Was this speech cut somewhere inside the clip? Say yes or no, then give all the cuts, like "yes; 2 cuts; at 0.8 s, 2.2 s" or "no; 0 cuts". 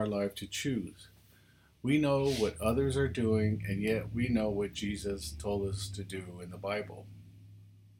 no; 0 cuts